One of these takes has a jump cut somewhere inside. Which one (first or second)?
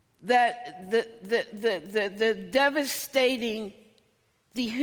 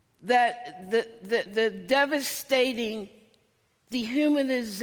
second